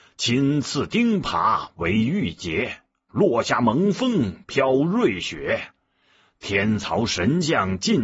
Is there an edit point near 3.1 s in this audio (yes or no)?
yes